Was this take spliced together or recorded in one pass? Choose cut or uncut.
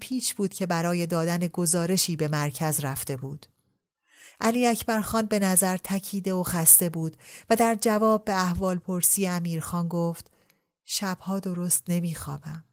uncut